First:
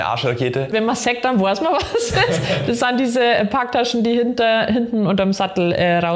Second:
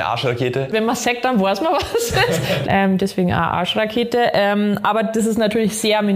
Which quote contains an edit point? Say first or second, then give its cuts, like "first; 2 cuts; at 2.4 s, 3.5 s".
second; 1 cut; at 2.6 s